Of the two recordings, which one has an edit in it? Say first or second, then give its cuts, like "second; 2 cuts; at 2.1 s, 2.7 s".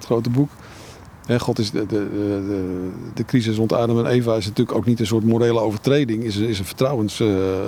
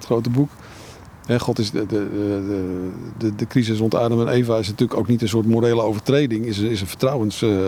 first; 1 cut; at 3.1 s